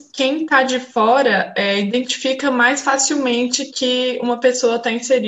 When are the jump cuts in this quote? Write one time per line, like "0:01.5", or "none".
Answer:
none